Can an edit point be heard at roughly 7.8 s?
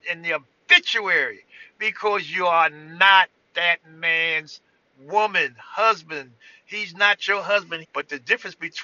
yes; 1 cut; at 7.8 s

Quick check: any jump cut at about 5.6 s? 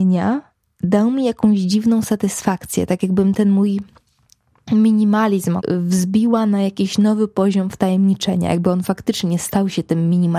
yes; 1 cut; at 5.6 s

